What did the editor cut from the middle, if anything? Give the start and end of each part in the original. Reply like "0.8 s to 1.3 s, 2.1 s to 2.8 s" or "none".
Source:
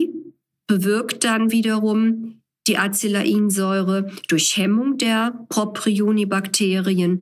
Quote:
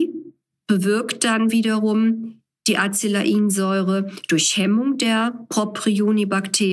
none